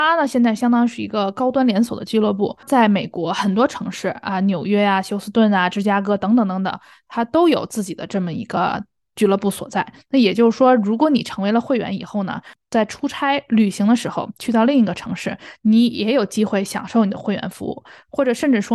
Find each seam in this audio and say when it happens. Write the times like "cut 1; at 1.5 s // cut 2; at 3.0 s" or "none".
none